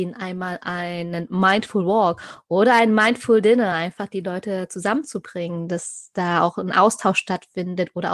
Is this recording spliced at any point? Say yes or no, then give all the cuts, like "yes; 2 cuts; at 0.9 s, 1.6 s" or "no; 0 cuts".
no; 0 cuts